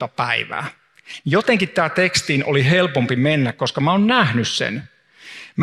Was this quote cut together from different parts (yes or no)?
no